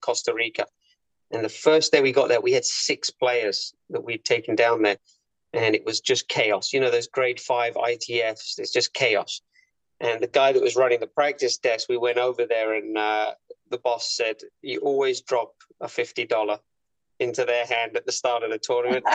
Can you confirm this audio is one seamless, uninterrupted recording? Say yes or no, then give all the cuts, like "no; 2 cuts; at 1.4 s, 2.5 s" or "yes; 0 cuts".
yes; 0 cuts